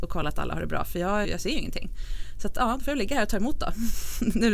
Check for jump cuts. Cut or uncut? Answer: cut